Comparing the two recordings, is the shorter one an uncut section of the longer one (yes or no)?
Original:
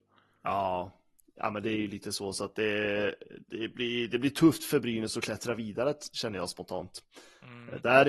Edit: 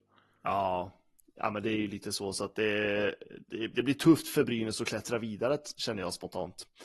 no